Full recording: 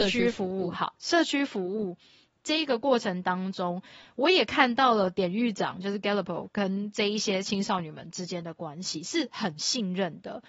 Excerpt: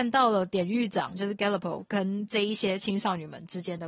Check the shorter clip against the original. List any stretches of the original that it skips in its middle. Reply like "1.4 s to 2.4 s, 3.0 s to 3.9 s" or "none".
none

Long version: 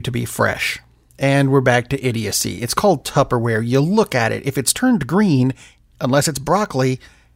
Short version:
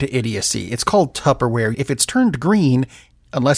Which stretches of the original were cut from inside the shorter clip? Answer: 3.6 s to 4.4 s

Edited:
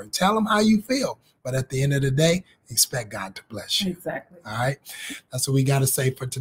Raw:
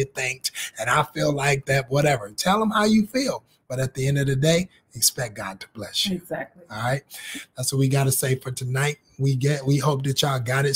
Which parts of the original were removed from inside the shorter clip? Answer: none

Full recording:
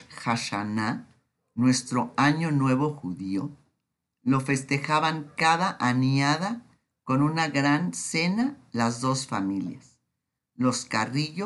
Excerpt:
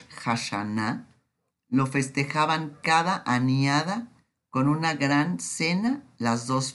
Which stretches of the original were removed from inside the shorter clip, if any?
1.5 s to 4.0 s

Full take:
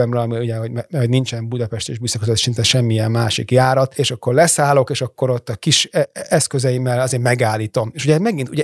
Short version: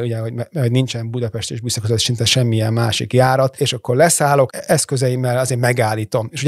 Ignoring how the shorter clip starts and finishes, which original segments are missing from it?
4.9 s to 6.1 s

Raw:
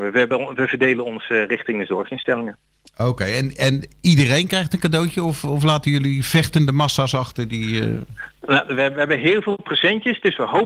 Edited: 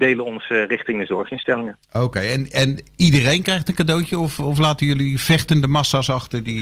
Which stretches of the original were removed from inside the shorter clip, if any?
2.6 s to 2.9 s

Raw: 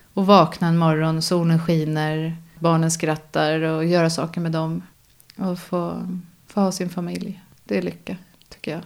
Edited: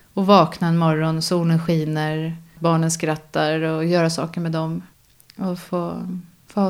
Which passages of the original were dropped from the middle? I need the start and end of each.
none

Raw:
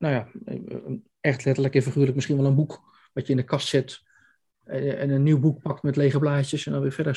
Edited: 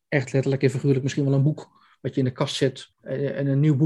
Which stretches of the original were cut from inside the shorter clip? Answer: 4.0 s to 4.6 s

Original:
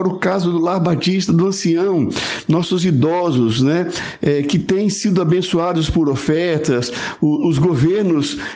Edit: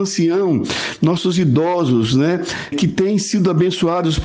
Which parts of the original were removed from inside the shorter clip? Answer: 4.2 s to 4.4 s

